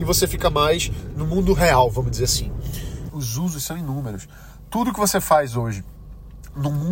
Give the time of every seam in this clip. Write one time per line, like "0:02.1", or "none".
0:03.1

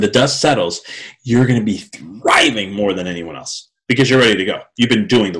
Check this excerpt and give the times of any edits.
none

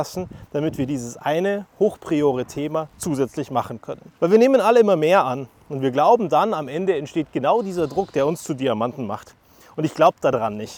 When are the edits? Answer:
0:04.2

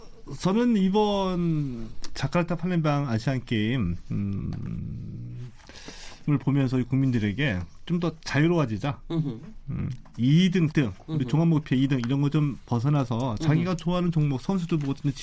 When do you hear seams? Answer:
0:10.7

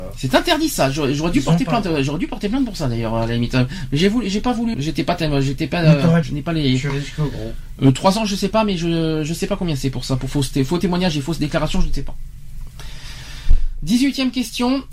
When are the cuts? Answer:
0:04.7
0:06.2

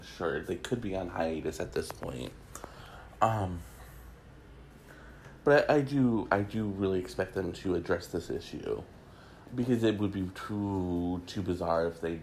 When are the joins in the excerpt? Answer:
none

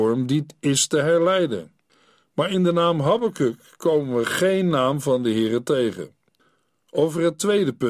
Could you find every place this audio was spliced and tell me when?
none

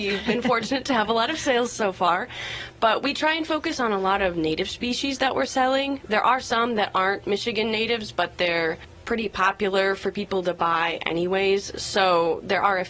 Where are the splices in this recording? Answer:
none

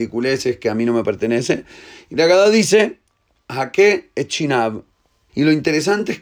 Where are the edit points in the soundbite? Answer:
0:05.3

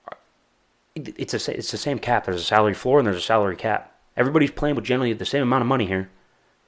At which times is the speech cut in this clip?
none

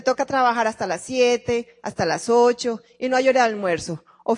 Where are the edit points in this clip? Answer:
none

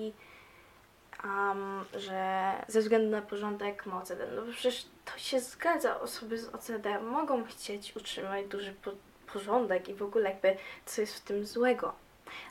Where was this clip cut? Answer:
none

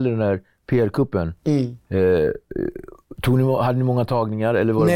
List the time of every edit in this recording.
0:01.9

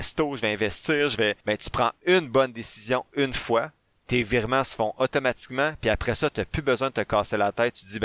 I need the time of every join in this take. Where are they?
none

